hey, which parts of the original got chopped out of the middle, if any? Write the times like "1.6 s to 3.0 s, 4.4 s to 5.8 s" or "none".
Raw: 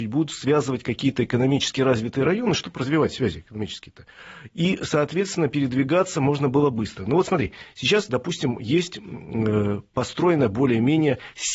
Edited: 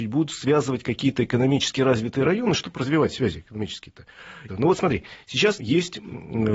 4.5 s to 7.0 s, 8.1 s to 8.6 s